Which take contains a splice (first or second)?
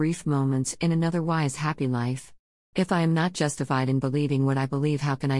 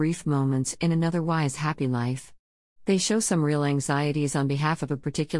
first